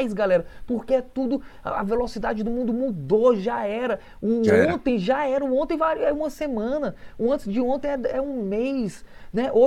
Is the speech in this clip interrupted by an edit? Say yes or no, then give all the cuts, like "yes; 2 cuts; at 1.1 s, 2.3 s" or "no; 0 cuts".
no; 0 cuts